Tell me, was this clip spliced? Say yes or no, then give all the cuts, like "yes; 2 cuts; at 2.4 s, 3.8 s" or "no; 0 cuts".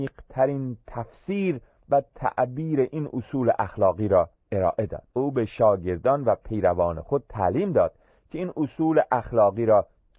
yes; 1 cut; at 5.1 s